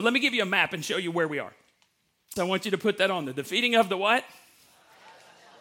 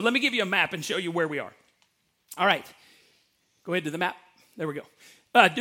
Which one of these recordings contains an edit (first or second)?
first